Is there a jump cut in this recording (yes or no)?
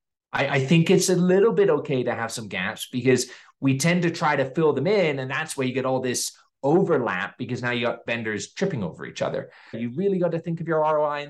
yes